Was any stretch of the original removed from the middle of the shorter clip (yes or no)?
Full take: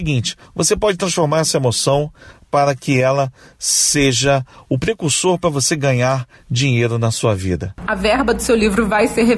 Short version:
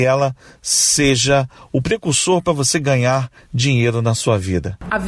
no